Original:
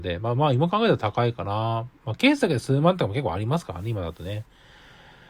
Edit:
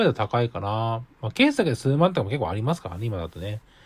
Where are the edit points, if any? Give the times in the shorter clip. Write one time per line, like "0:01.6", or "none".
none